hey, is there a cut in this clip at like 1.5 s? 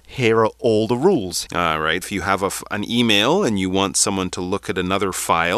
yes; 1 cut; at 1.5 s

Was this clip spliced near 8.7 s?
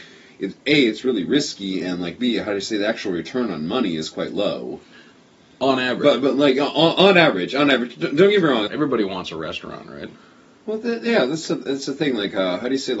yes; 1 cut; at 8.7 s

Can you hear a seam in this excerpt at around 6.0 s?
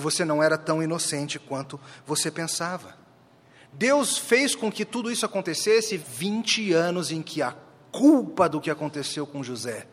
yes; 1 cut; at 6.0 s

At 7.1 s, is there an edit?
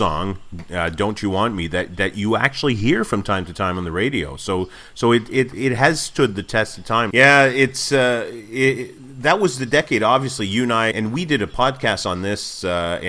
yes; 2 cuts; at 7.1 s, 10.9 s

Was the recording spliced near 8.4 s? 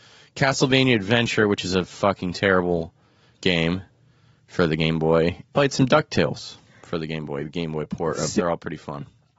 yes; 2 cuts; at 5.5 s, 8.4 s

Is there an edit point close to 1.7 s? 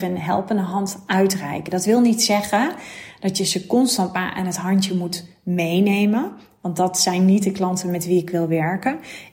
no; 0 cuts

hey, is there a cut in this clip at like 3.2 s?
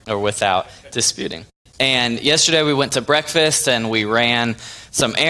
no; 1 cut; at 1.7 s

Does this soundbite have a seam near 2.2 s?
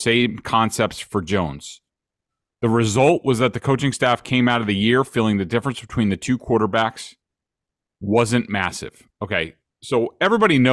no; 0 cuts

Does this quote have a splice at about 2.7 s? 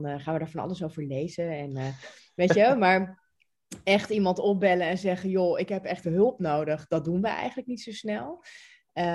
no; 1 cut; at 6.0 s

